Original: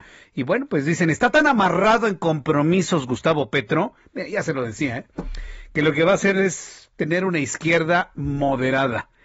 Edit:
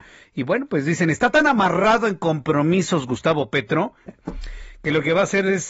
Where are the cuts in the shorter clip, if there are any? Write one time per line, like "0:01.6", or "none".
0:04.1